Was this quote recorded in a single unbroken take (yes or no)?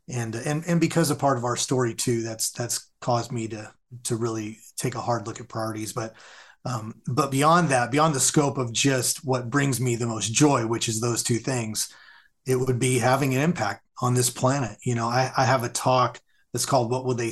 yes